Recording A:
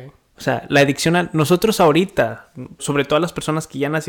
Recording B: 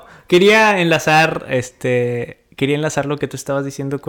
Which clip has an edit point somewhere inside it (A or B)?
A